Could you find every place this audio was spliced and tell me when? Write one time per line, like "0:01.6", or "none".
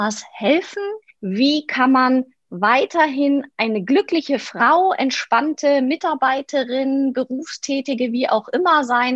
0:01.1